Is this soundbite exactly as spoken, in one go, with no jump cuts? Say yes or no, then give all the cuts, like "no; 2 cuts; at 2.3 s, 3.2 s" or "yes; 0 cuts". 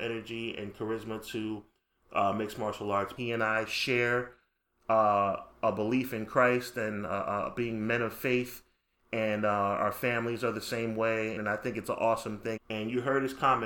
no; 3 cuts; at 3.2 s, 11.4 s, 12.6 s